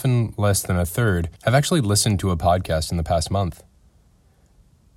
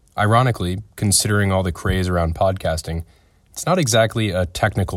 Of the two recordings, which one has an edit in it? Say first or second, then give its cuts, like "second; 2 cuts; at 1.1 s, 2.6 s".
first; 1 cut; at 1.4 s